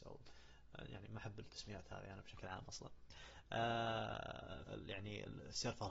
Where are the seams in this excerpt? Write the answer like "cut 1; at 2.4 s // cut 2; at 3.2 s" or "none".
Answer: cut 1; at 4.7 s